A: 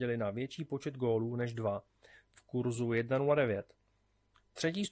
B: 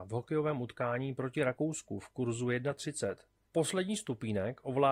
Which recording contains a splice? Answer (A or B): B